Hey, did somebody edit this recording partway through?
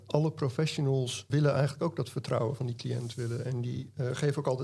yes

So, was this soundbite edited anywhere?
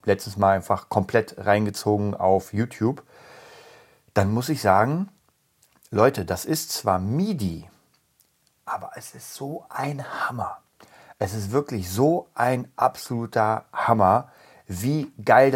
no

